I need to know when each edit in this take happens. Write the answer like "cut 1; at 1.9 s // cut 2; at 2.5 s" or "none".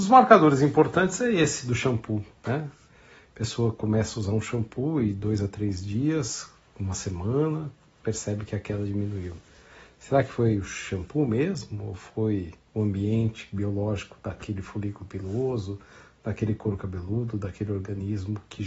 none